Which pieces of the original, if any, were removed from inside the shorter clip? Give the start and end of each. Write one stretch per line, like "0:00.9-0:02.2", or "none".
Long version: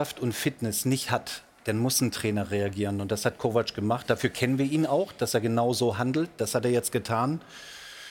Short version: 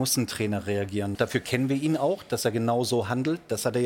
0:03.0-0:04.0